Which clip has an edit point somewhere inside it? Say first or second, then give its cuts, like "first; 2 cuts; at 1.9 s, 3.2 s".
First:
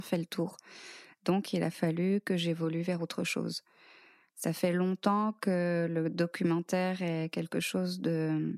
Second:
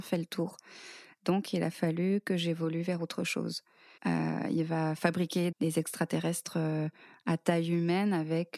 second; 2 cuts; at 4.0 s, 5.5 s